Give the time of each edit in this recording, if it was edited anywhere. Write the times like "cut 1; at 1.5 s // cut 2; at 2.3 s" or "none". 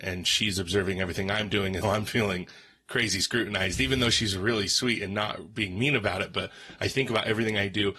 cut 1; at 1.8 s